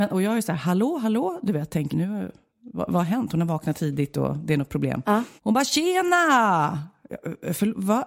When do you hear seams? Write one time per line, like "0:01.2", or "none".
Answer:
0:01.9
0:05.4